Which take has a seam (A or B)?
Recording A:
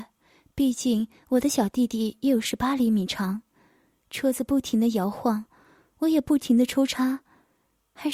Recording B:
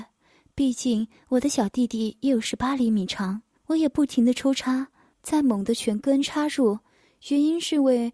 B